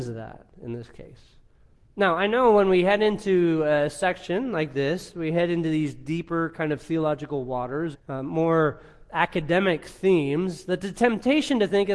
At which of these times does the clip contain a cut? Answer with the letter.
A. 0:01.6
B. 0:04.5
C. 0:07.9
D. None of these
C